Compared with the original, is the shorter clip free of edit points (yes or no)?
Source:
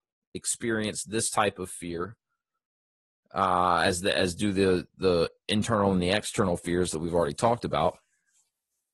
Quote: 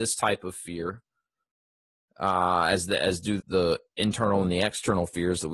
no